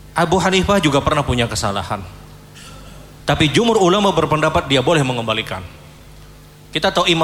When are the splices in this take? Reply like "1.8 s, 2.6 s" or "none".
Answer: 3.2 s